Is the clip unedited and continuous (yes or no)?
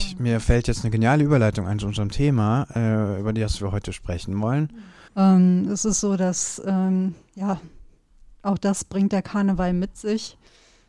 no